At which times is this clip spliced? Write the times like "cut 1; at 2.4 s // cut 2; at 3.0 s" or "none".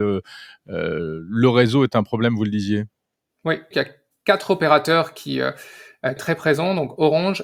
cut 1; at 3.7 s // cut 2; at 6.2 s